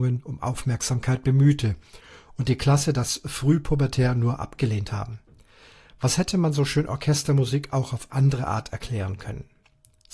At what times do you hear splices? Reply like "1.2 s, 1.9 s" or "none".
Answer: none